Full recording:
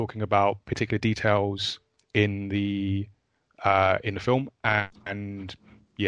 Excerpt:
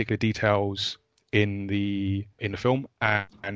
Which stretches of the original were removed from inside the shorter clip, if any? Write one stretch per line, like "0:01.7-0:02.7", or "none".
0:03.2-0:04.0